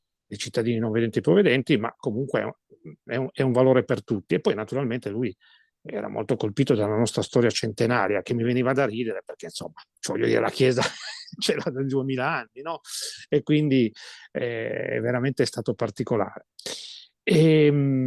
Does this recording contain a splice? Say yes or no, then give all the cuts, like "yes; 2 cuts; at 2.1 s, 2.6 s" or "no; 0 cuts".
no; 0 cuts